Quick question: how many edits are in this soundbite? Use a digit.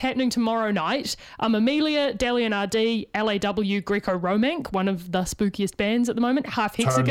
0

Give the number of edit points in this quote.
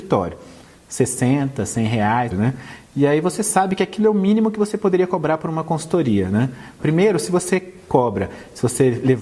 2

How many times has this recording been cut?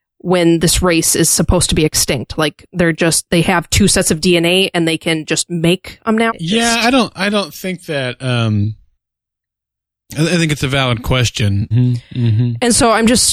2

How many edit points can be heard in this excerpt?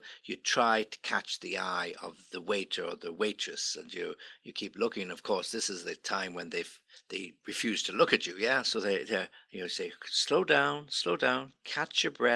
1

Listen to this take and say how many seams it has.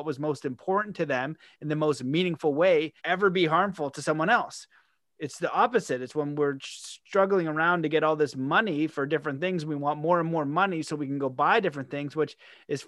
1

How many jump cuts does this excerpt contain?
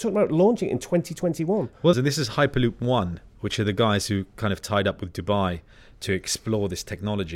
1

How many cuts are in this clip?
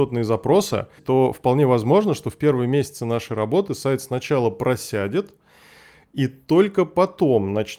1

